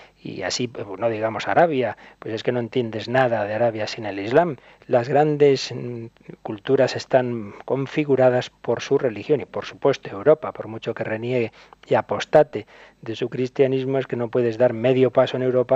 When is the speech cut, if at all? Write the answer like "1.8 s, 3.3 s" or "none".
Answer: none